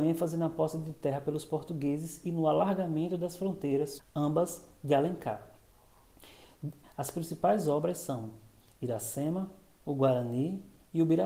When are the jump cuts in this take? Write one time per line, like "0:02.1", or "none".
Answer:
0:04.0
0:06.8